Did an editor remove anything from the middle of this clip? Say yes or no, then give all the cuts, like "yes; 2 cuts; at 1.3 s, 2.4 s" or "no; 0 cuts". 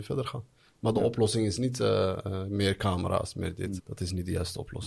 yes; 1 cut; at 3.8 s